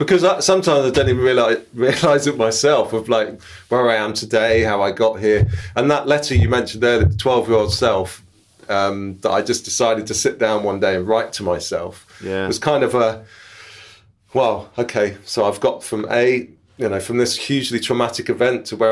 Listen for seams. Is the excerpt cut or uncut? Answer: uncut